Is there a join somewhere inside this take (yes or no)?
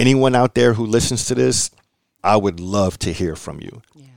yes